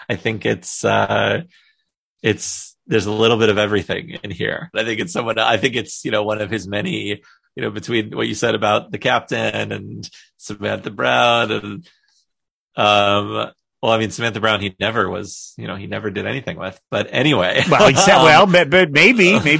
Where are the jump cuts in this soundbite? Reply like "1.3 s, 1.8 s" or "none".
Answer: 4.7 s